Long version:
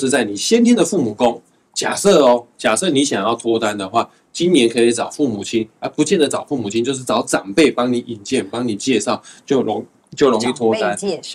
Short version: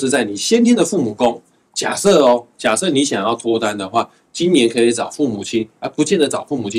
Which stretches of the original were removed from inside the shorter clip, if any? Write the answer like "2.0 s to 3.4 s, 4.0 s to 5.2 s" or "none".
none